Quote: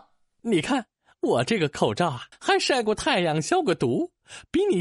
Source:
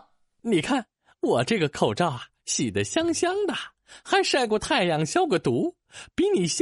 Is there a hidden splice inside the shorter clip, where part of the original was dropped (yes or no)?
yes